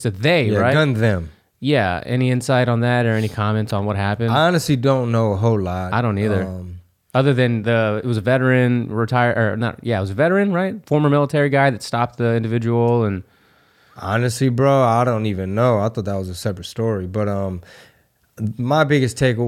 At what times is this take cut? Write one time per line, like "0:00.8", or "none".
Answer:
none

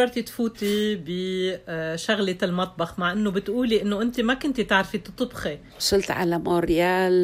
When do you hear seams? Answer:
0:05.7

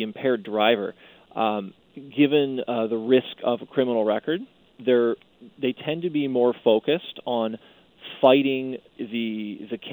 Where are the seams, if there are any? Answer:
0:01.8
0:09.0

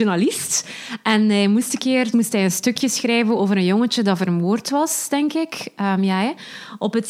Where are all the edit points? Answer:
0:02.1

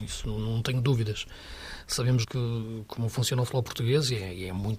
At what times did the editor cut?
0:02.2

